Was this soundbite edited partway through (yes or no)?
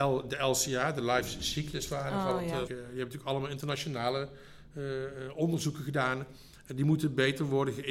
yes